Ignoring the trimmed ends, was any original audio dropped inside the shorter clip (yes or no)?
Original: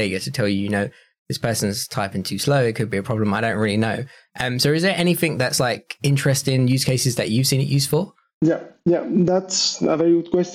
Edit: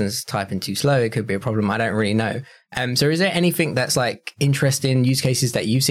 no